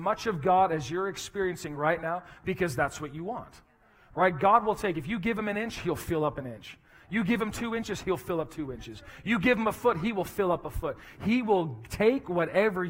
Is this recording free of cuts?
yes; 0 cuts

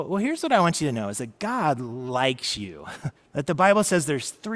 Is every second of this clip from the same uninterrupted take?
no; 1 cut; at 3.1 s

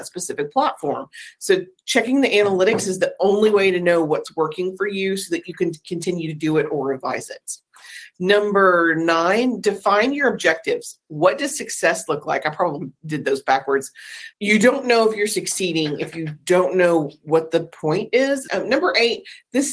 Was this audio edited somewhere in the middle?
yes; 2 cuts; at 14.3 s, 18.5 s

